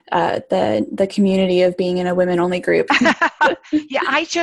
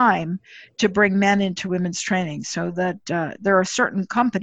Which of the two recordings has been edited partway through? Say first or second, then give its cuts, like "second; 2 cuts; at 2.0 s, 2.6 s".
first; 1 cut; at 2.9 s